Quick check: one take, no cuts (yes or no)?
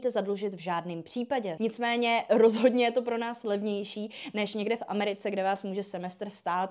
no